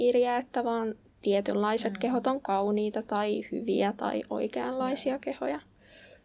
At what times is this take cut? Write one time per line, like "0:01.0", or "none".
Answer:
none